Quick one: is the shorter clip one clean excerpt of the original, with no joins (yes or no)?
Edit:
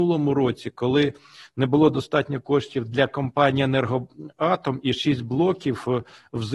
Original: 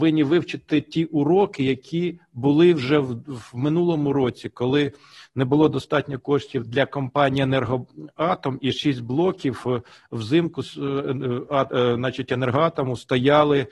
yes